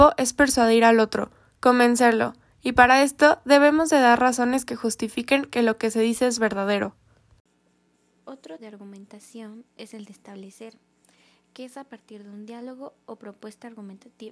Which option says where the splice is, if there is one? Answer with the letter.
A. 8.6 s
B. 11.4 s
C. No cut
A